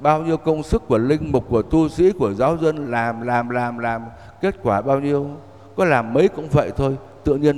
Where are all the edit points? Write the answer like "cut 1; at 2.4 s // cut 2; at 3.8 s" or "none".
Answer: cut 1; at 3.4 s